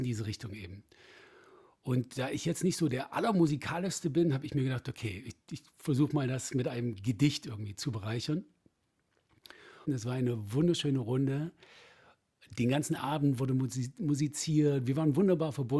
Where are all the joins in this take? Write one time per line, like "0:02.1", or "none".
0:09.9